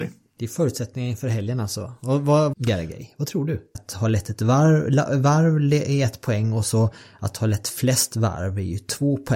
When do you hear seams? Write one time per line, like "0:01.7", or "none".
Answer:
0:02.5
0:03.7

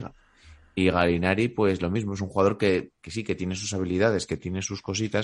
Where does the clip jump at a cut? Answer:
none

